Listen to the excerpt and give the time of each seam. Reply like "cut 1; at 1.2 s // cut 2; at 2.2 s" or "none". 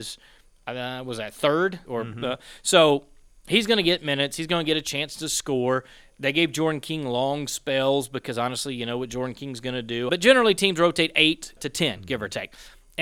cut 1; at 1.9 s // cut 2; at 10.1 s // cut 3; at 11.6 s